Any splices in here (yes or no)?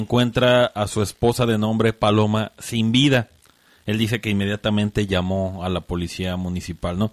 no